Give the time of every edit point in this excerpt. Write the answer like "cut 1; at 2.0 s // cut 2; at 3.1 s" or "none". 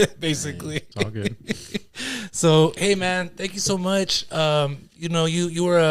none